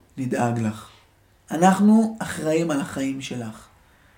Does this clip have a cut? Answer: no; 0 cuts

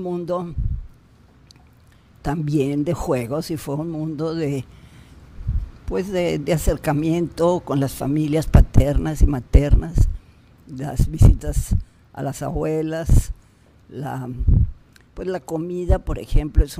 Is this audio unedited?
yes; 0 cuts

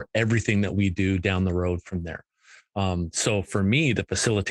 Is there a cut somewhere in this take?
no; 0 cuts

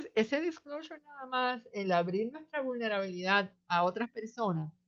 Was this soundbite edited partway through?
no; 0 cuts

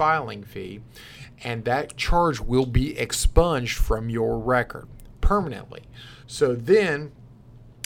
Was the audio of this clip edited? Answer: no; 0 cuts

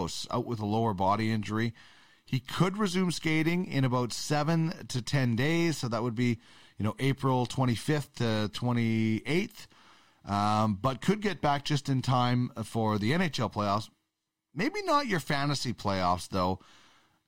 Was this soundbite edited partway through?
no; 0 cuts

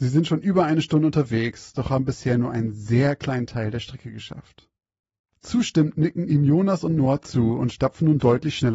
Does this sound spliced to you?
no; 0 cuts

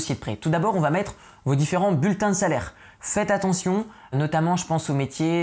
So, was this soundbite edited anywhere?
yes; 2 cuts; at 2.9 s, 4.1 s

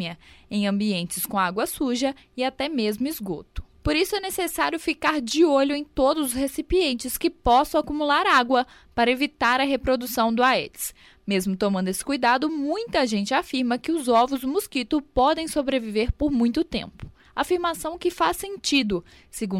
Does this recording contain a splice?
no; 0 cuts

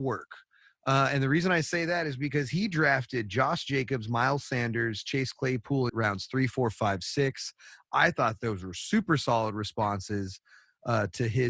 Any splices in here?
yes; 1 cut; at 5.9 s

